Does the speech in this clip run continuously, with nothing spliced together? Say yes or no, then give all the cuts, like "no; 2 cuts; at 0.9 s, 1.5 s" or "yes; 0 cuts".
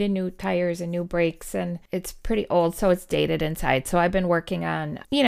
yes; 0 cuts